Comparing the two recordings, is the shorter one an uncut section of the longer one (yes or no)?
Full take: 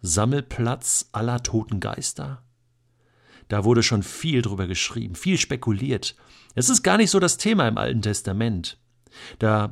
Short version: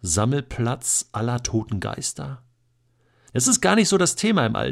no